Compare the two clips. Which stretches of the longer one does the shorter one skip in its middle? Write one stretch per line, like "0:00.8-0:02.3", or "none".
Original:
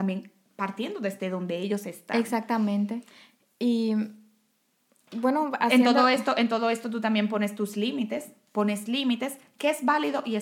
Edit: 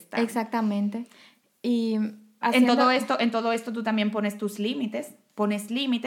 0:04.4-0:05.6